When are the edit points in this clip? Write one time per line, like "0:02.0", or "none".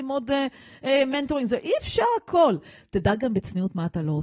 none